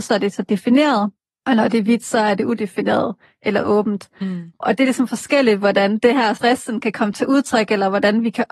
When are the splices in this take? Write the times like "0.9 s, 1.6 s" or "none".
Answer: none